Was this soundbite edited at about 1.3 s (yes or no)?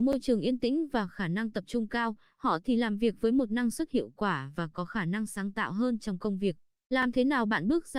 no